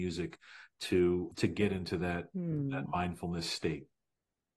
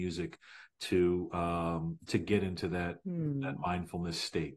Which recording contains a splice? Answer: first; 1 cut; at 1.3 s

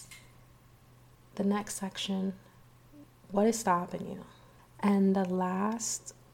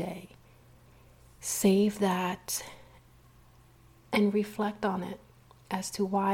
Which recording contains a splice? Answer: first; 1 cut; at 4.6 s

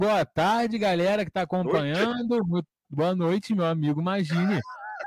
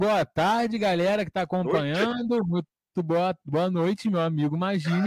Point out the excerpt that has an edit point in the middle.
first; 1 cut; at 2.8 s

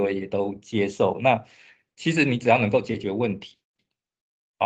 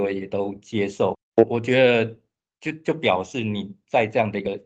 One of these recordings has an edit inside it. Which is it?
second; 1 cut; at 1.1 s

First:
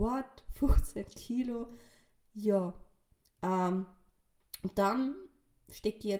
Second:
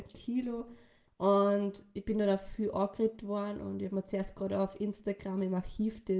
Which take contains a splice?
second; 1 cut; at 1.1 s

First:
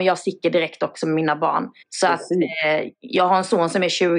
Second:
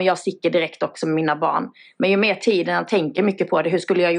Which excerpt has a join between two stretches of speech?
first; 1 cut; at 1.8 s

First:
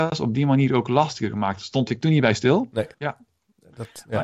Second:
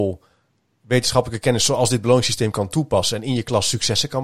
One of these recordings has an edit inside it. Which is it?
first; 1 cut; at 2.9 s

